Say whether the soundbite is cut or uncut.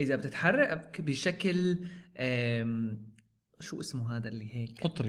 uncut